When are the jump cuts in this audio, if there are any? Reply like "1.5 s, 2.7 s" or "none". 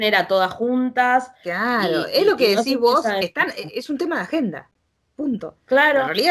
none